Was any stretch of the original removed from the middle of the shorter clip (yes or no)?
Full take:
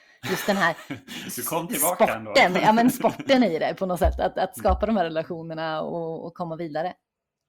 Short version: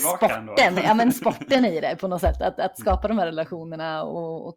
no